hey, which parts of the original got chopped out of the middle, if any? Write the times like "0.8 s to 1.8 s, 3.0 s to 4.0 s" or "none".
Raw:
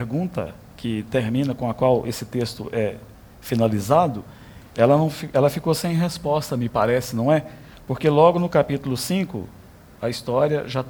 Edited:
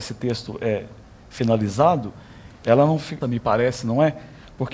5.3 s to 6.5 s